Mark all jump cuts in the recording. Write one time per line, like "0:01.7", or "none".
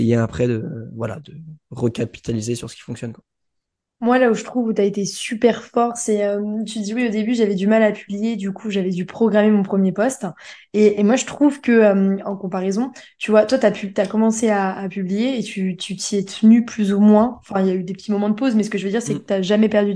none

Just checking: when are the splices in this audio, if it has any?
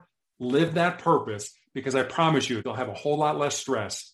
0:02.6

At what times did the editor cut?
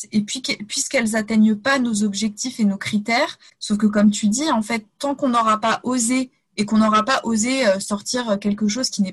0:03.5

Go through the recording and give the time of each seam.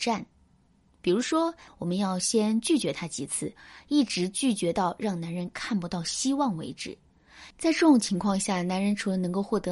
0:01.7
0:07.5

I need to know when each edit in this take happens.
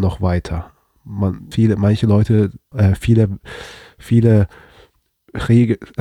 0:01.5
0:02.7

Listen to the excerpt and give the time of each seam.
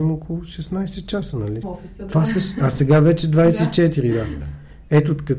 0:01.6

